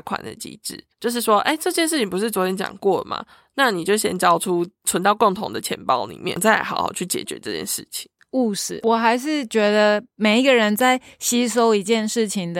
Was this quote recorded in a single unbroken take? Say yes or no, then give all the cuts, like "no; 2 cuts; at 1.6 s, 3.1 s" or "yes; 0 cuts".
no; 2 cuts; at 0.9 s, 8.2 s